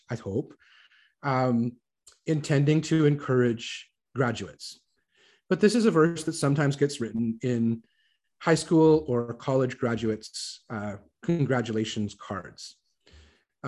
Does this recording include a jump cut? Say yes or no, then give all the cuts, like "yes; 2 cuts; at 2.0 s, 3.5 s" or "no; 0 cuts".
no; 0 cuts